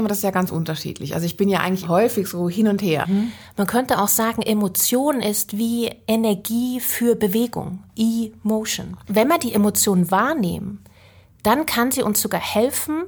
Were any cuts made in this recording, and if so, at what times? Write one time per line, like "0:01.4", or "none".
0:03.0
0:09.0